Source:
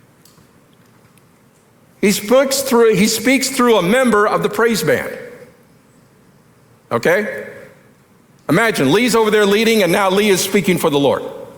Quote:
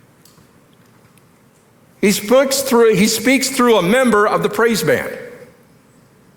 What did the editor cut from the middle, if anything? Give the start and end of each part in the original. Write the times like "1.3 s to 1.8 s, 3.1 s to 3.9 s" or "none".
none